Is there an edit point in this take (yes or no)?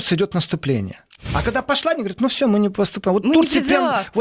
no